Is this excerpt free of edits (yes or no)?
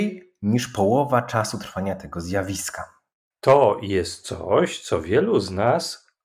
yes